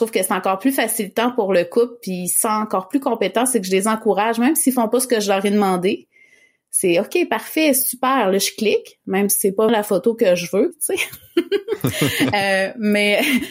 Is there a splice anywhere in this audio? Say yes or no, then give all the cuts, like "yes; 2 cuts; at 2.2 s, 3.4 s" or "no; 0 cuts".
yes; 2 cuts; at 9.7 s, 10.7 s